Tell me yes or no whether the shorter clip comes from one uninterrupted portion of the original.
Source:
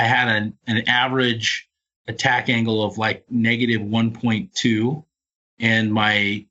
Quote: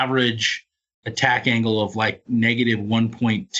yes